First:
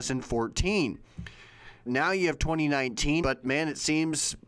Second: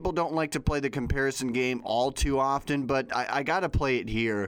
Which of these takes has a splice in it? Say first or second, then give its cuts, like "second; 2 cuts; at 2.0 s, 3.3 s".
first; 2 cuts; at 1.9 s, 3.2 s